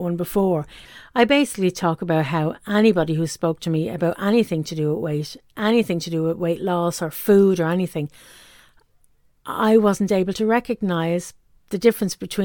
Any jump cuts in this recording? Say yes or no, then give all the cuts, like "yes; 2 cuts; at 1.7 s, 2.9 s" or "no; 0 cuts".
no; 0 cuts